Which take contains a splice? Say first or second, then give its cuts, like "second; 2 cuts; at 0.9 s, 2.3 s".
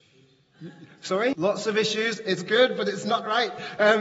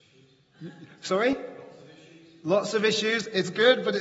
first; 1 cut; at 1.3 s